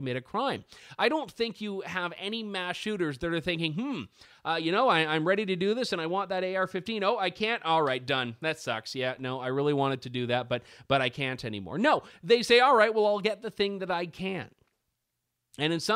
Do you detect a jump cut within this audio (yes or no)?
no